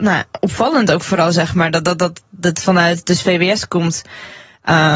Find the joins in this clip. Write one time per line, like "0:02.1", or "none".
none